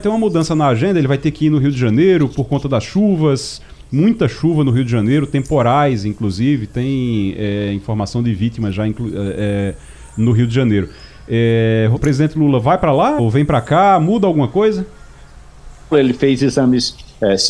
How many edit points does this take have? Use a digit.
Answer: 3